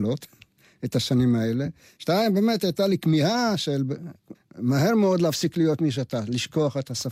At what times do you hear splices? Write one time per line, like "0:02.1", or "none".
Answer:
0:02.0
0:04.3